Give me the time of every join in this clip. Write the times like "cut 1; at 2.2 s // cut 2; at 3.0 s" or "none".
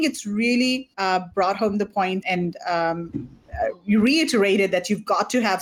cut 1; at 0.9 s // cut 2; at 2.2 s